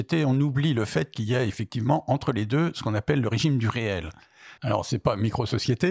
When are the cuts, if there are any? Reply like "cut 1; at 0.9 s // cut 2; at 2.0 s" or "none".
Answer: cut 1; at 4.6 s

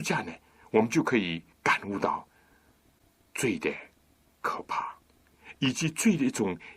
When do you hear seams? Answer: cut 1; at 1.5 s

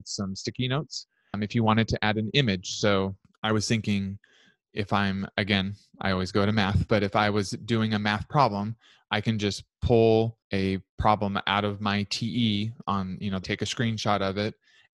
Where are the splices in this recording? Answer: cut 1; at 13.4 s

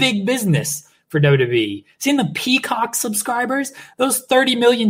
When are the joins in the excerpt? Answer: none

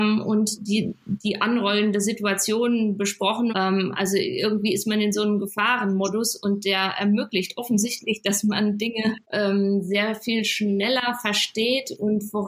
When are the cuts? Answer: cut 1; at 3.5 s // cut 2; at 9.2 s

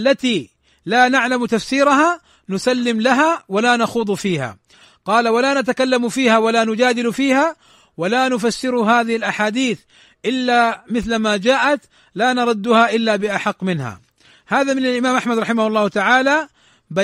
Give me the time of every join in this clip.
none

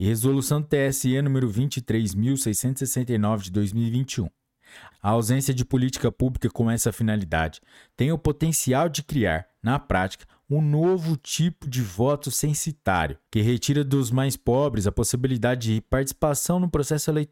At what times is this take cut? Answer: cut 1; at 4.9 s // cut 2; at 13.3 s

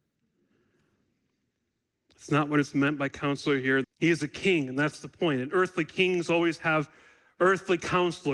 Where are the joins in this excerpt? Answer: cut 1; at 3.8 s

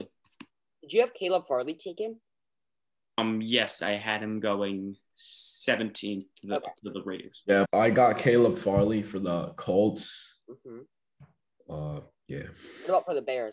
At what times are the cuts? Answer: cut 1; at 7.6 s

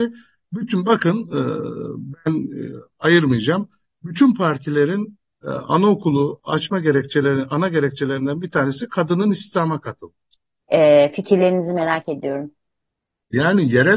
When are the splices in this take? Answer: cut 1; at 10.6 s

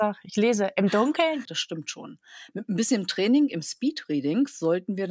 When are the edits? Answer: cut 1; at 1.5 s

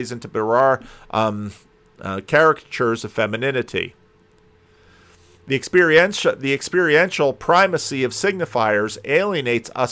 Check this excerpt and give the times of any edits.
none

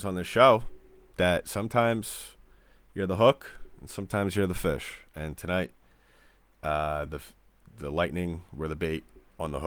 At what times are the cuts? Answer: none

